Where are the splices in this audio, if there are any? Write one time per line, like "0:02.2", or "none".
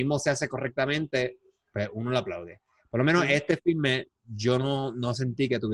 none